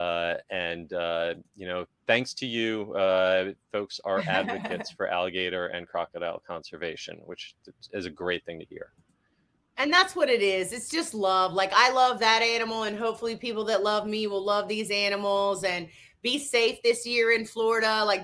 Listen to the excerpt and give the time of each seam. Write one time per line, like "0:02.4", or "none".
none